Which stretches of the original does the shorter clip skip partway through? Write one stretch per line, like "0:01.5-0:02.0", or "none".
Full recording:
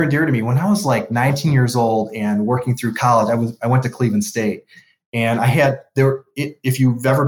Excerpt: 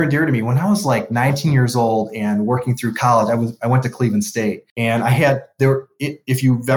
0:04.7-0:05.1